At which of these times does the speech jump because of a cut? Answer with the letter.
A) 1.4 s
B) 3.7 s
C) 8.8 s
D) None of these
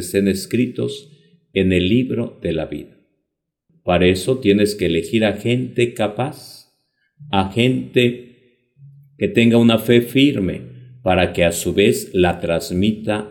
B